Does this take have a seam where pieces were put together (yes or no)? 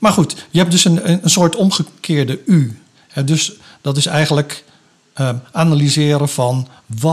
yes